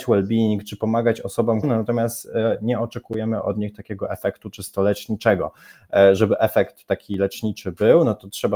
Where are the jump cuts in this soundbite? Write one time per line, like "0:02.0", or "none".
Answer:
0:01.6